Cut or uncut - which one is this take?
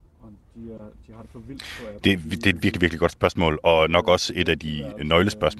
uncut